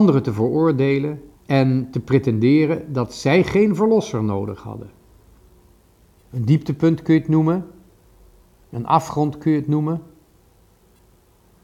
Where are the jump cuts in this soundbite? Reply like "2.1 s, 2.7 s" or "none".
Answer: 1.3 s, 6.2 s